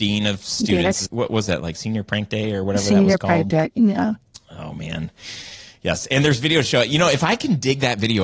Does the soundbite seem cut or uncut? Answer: cut